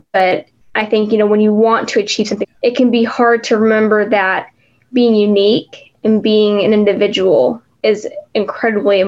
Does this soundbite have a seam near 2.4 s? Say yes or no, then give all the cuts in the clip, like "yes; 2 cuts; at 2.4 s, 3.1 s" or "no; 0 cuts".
yes; 1 cut; at 2.4 s